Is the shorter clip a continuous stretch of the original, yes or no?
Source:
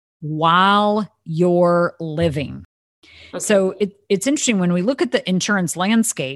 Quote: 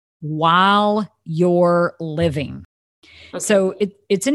yes